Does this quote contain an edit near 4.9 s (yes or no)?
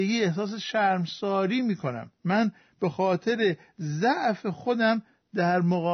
no